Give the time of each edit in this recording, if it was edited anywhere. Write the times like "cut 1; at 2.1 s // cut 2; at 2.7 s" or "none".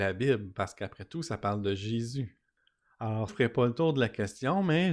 cut 1; at 3.3 s